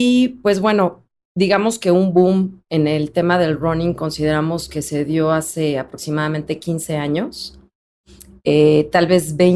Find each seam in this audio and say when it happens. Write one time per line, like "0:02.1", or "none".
0:01.2